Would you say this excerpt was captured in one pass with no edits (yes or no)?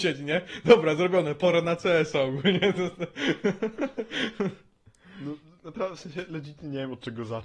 yes